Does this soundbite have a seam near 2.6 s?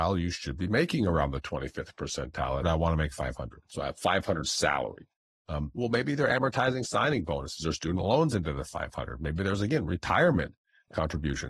yes; 1 cut; at 2.6 s

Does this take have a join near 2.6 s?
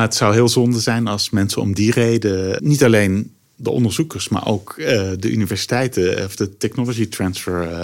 yes; 1 cut; at 2.6 s

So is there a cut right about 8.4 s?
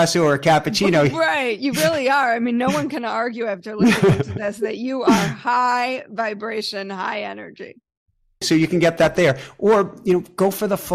yes; 1 cut; at 8.4 s

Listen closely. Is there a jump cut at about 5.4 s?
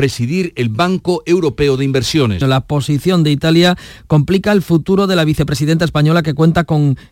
no; 1 cut; at 2.4 s

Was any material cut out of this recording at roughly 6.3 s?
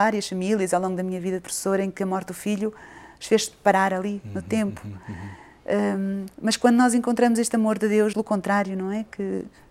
yes; 2 cuts; at 6.3 s, 8.1 s

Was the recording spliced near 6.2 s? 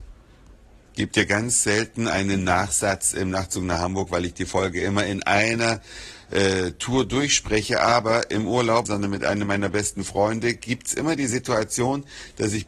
no; 1 cut; at 8.9 s

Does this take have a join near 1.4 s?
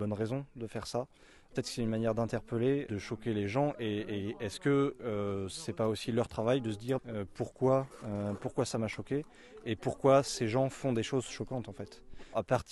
no; 1 cut; at 7.0 s

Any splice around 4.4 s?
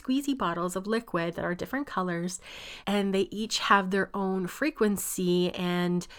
no; 1 cut; at 2.8 s

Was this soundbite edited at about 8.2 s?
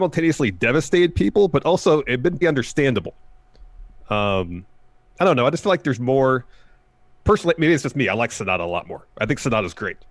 no; 1 cut; at 2.4 s

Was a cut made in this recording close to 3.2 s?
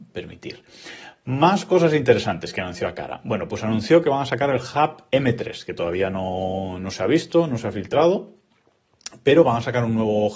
no; 0 cuts

